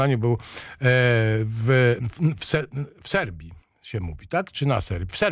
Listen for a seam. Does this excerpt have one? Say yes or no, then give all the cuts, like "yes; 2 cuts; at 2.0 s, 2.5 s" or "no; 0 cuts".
no; 0 cuts